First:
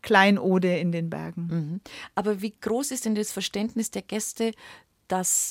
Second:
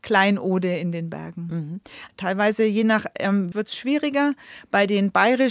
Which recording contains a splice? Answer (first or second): second